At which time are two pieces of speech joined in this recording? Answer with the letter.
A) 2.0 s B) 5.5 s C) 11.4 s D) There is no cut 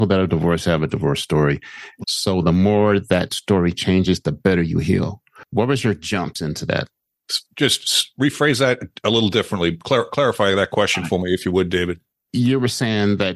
A